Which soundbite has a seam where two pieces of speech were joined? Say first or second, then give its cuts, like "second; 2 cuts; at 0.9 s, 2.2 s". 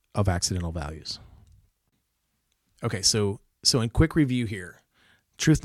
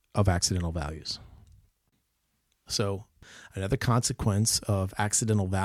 second; 1 cut; at 2.7 s